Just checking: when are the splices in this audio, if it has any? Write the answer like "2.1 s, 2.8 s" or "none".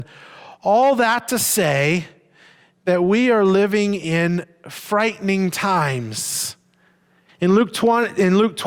7.3 s